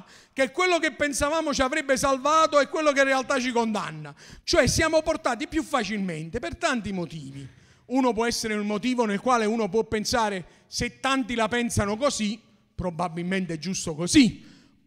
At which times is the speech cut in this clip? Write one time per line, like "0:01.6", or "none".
0:04.4